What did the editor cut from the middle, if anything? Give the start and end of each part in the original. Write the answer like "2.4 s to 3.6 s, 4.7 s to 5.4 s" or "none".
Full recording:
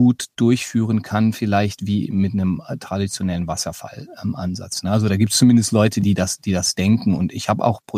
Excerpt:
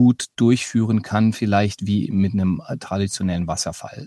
none